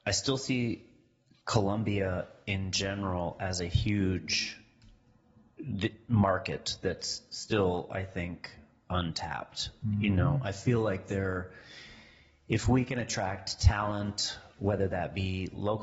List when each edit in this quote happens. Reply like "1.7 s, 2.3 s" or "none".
none